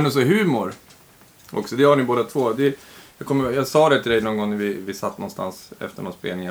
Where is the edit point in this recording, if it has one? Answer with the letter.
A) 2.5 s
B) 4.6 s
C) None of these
C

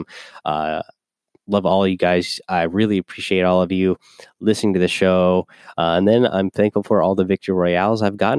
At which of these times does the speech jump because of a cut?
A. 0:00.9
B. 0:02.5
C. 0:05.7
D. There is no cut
C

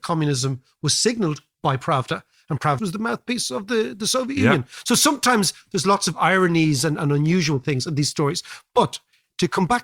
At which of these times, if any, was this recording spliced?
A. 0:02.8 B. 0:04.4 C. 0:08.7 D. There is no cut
A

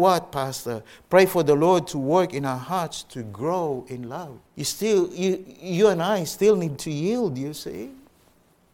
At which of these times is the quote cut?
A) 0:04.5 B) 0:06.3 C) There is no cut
A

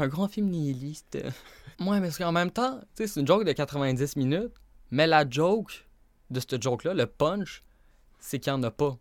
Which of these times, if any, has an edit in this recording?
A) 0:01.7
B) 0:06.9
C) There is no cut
A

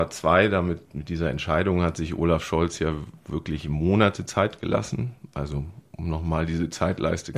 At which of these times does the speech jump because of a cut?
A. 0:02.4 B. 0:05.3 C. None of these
C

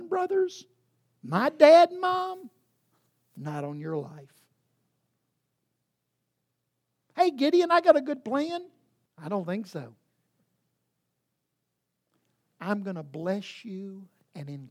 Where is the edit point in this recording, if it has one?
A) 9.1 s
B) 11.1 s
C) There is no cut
A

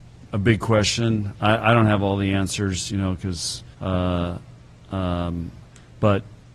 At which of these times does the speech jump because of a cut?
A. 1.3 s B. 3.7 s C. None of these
B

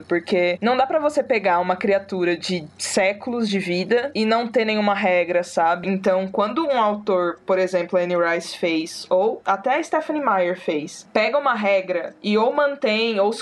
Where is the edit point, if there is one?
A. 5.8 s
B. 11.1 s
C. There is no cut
A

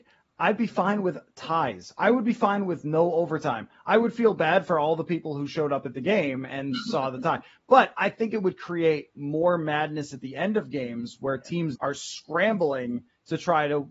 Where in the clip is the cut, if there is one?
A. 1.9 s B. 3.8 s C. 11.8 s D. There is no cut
C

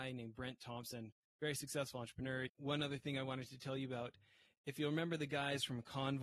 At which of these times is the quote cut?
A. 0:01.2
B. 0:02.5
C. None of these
B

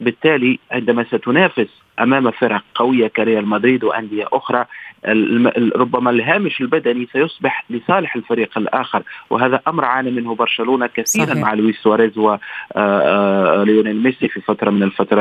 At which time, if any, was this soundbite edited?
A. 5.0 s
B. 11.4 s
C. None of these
C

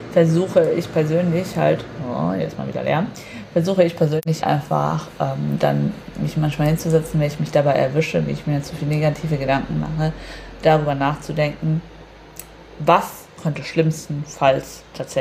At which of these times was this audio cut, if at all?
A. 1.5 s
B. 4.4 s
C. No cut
B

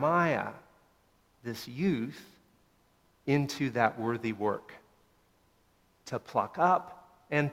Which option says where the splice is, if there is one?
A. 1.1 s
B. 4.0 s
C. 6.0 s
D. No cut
D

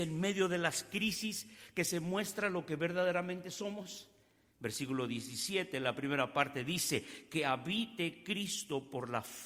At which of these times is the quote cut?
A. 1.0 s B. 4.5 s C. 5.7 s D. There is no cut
B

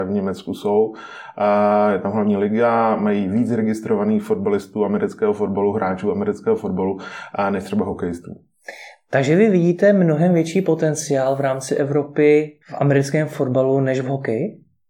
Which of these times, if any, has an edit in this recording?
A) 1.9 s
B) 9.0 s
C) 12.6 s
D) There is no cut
C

